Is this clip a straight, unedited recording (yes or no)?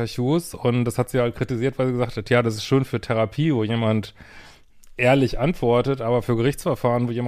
yes